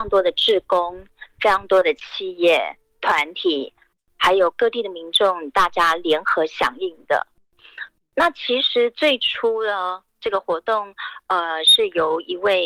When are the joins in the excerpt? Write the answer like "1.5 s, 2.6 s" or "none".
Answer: none